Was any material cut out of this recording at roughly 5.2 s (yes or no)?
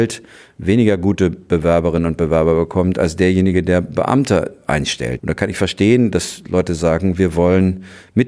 yes